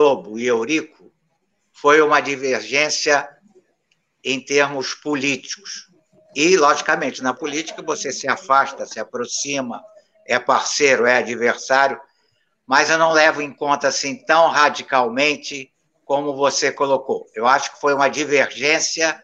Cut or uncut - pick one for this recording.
uncut